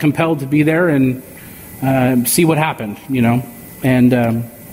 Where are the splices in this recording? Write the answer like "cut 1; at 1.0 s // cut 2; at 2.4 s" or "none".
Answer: none

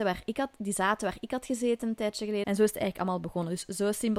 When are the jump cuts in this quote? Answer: cut 1; at 2.4 s

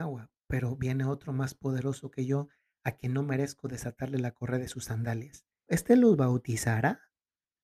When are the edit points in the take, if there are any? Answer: cut 1; at 5.7 s

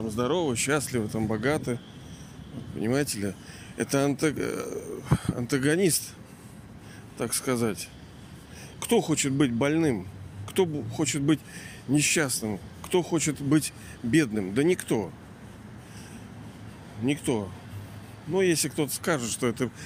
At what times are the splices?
none

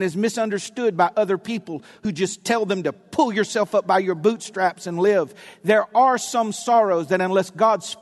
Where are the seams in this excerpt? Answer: none

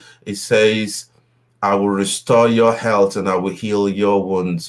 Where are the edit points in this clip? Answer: none

